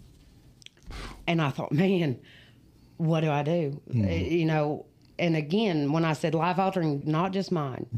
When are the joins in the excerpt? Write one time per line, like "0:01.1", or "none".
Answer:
0:07.0